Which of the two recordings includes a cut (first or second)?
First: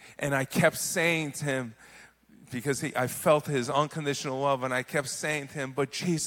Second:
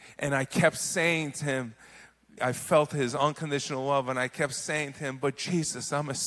second